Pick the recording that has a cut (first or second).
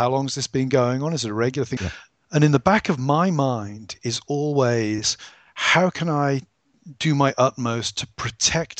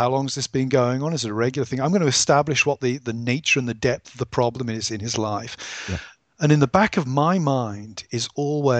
first